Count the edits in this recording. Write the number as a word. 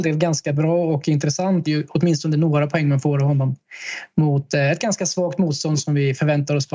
one